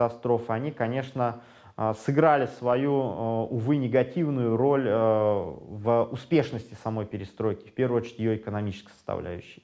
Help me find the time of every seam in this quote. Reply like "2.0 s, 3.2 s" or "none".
none